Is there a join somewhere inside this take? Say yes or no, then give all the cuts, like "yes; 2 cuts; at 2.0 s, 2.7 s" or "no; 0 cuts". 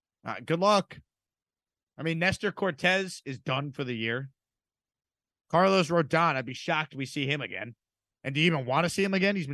no; 0 cuts